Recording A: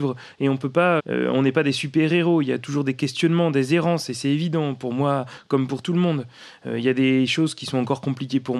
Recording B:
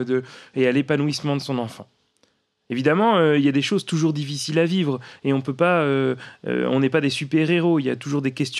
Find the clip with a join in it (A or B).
A